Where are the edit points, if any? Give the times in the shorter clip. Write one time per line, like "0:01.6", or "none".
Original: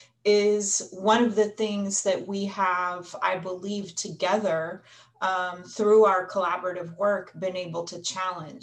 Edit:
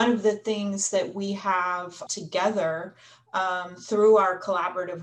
0:02.1